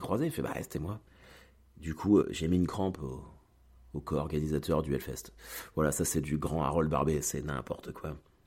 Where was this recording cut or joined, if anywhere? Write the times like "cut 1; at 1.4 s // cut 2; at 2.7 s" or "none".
cut 1; at 2.2 s